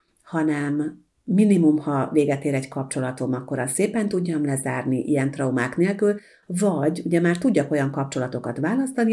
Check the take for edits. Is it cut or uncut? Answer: uncut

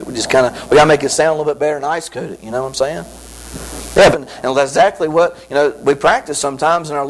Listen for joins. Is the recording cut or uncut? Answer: cut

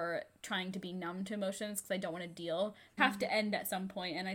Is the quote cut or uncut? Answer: cut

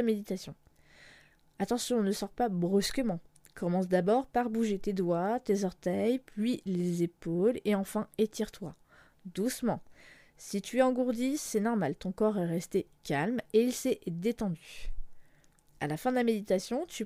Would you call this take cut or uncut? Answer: uncut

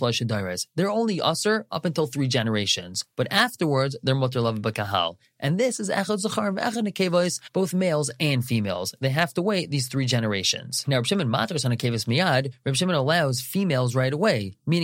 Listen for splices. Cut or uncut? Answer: uncut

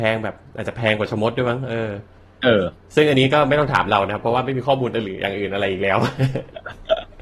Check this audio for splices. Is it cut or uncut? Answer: uncut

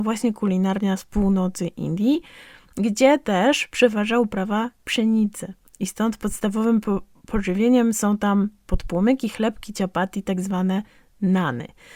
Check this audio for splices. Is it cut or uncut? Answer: uncut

